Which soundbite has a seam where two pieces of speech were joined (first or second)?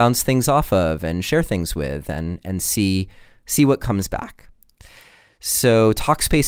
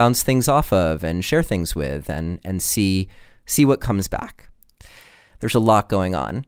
second